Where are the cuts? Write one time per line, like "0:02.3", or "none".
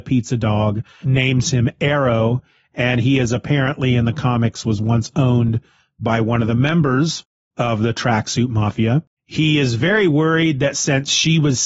0:01.0
0:09.2